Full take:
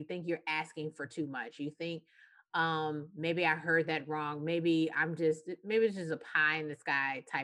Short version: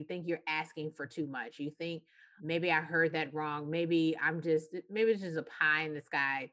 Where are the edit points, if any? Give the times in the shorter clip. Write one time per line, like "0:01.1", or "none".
0:02.4